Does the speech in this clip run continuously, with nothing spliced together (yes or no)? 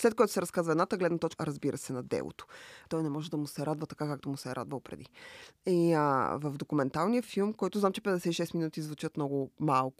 no